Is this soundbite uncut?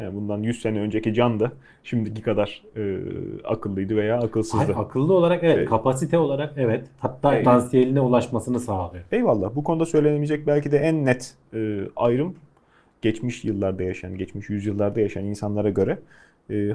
no; 1 cut; at 7.4 s

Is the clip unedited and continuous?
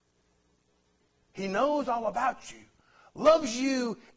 no; 1 cut; at 1.2 s

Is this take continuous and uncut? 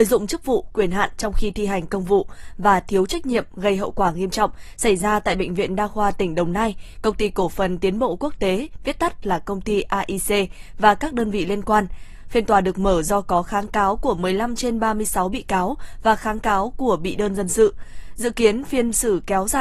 yes; 0 cuts

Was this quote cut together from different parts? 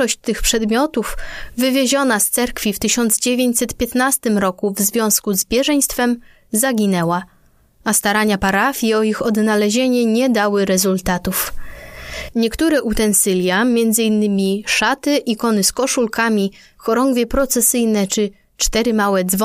no; 0 cuts

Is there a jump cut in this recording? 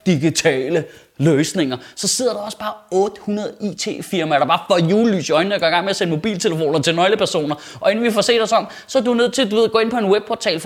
no; 0 cuts

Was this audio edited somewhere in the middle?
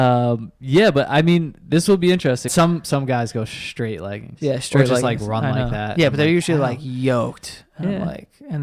yes; 1 cut; at 2.5 s

